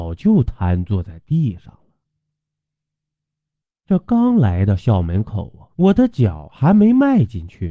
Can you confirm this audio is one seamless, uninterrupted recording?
no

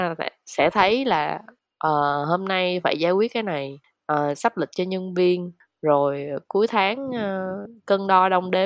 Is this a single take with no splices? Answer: yes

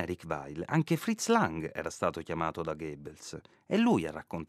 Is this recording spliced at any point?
no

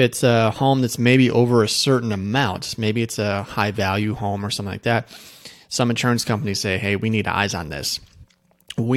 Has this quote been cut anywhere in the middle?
no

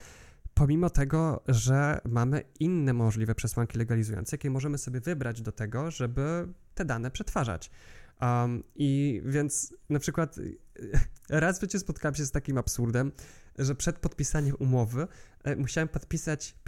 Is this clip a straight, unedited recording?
yes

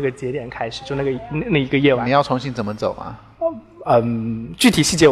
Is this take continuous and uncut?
yes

